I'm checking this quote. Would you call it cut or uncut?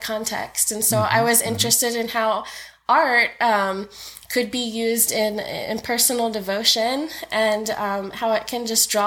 uncut